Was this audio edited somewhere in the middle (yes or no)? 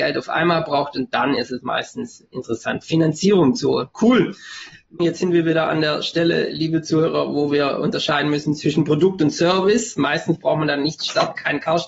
yes